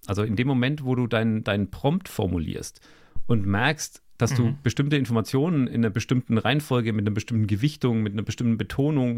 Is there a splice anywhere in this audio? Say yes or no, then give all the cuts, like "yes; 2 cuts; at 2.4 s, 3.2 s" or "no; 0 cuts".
yes; 1 cut; at 5.7 s